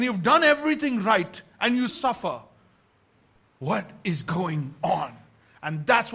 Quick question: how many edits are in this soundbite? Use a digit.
1